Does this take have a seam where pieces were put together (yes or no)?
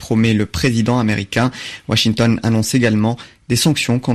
no